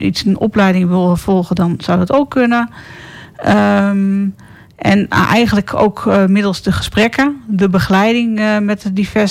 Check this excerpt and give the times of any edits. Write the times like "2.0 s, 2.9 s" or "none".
none